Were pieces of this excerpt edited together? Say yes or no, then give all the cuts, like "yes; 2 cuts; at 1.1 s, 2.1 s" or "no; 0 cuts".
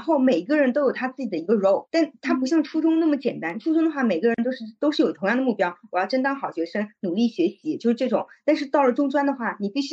no; 0 cuts